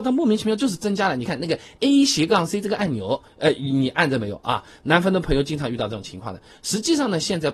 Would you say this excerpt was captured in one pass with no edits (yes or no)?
no